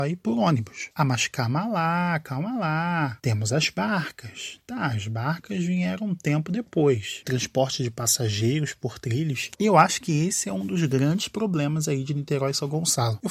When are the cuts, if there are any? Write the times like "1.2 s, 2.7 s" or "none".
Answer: 7.2 s